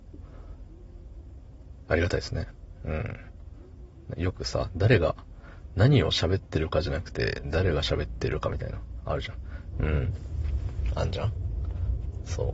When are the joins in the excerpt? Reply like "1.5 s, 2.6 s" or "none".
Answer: 9.7 s